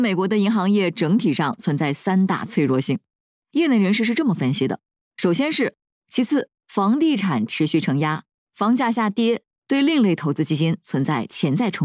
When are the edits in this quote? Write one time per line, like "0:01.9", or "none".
0:05.9